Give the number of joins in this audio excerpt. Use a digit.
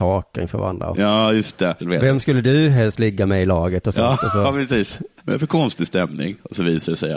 2